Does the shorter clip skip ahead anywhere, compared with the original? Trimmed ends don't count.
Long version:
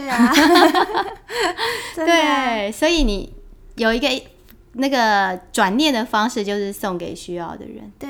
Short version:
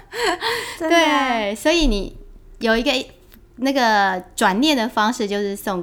no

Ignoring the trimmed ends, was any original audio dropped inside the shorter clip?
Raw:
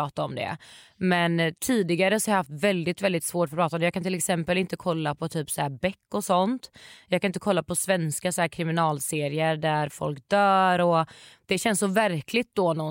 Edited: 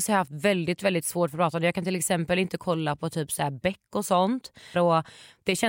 yes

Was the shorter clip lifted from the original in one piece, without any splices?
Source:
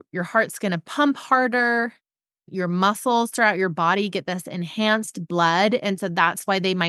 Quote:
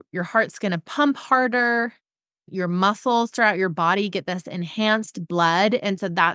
yes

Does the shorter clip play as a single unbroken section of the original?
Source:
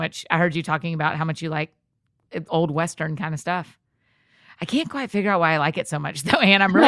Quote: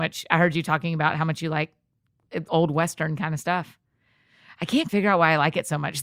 no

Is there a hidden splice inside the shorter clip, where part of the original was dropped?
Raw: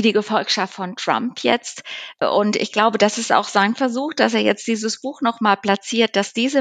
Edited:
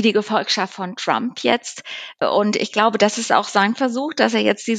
no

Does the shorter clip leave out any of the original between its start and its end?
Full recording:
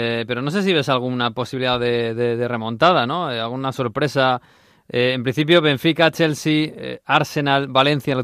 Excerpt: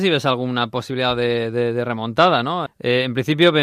yes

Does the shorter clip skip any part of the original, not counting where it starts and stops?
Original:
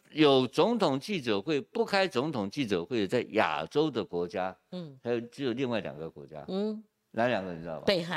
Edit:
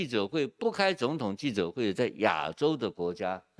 no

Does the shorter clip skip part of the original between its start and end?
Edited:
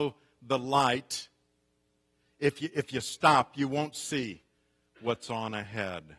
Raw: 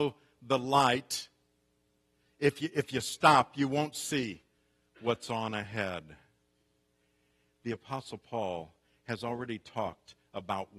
no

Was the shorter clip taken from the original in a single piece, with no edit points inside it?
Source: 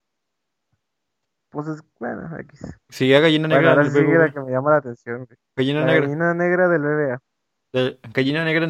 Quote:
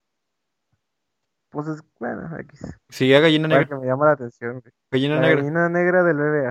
no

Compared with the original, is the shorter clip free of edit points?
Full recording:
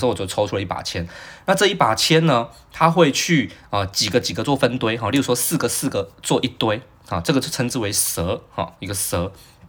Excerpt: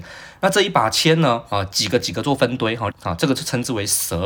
no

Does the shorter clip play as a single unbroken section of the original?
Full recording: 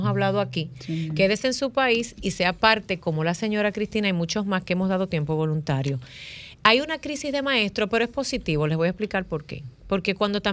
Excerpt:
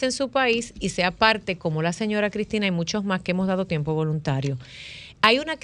yes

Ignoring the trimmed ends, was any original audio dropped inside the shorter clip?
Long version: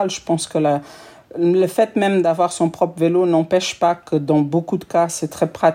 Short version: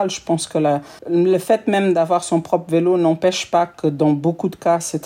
yes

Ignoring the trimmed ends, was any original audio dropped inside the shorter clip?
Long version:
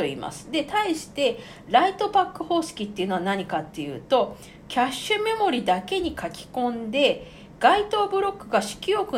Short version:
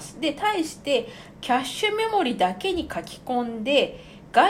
yes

